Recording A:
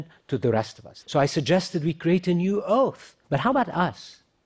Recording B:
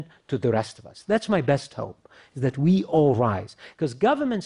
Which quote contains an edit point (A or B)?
A